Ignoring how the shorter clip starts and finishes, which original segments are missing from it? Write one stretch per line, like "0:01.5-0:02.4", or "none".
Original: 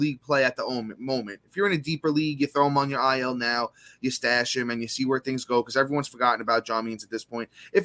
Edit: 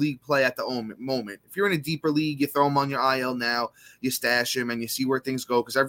none